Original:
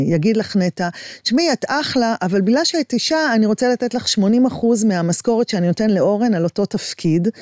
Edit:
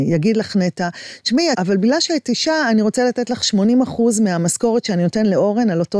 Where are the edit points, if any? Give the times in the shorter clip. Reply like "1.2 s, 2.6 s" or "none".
1.5 s